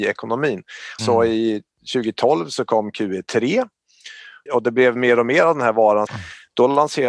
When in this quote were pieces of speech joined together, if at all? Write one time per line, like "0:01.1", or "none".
0:01.0
0:04.5
0:06.1